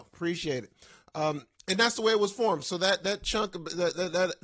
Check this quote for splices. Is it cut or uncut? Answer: uncut